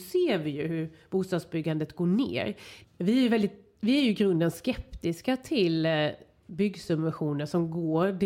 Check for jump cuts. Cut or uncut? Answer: cut